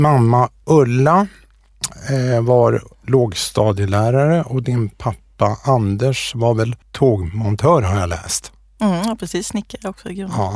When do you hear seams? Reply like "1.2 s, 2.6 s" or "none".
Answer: 6.8 s